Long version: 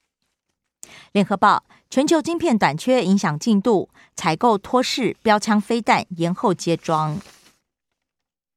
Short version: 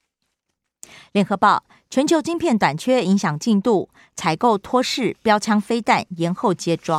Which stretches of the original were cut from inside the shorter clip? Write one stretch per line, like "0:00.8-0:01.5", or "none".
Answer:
none